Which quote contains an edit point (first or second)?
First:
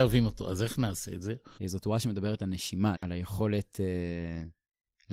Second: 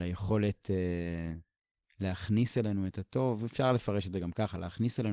first